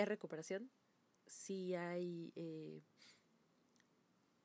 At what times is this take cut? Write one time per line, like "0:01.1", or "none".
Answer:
none